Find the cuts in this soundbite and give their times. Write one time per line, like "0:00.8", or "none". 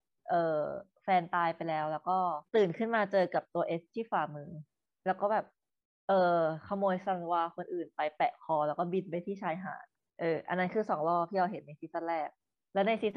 0:02.5